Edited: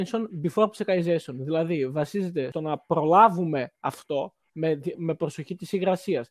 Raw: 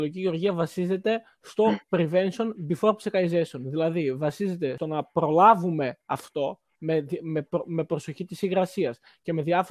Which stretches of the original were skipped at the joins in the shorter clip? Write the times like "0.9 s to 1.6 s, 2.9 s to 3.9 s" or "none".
7.2 s to 7.6 s